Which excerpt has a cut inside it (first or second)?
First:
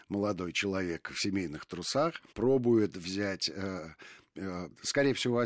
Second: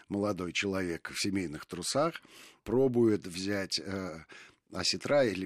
first